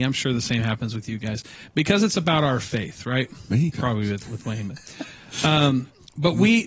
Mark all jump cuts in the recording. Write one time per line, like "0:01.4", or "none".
0:03.7